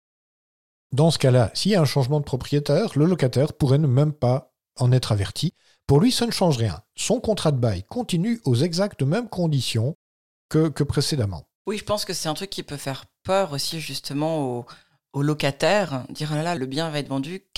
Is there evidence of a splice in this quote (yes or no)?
yes